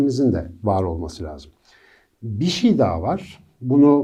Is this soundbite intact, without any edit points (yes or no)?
yes